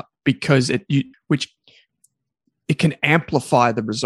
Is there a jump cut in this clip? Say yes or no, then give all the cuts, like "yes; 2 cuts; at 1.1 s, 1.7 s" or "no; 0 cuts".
yes; 1 cut; at 1.1 s